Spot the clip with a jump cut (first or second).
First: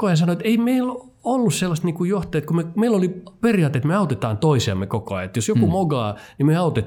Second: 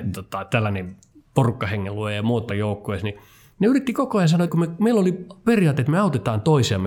second